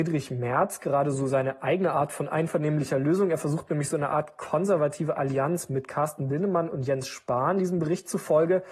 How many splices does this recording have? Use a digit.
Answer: 0